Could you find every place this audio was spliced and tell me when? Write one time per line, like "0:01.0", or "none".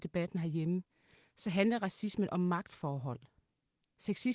none